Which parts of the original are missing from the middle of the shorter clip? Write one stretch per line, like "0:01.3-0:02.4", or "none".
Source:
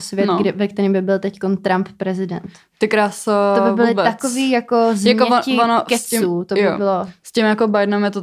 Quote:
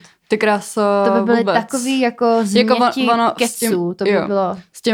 none